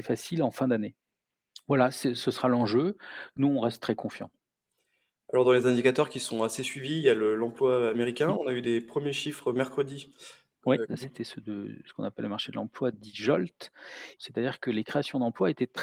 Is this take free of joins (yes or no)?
no